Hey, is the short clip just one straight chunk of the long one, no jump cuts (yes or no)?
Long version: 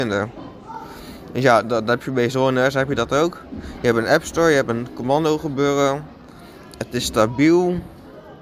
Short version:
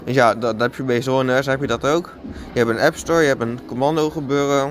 yes